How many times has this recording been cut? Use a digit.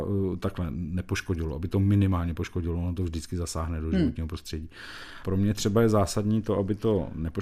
1